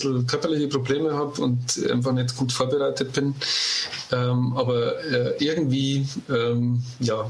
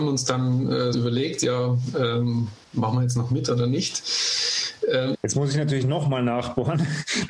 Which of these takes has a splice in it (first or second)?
second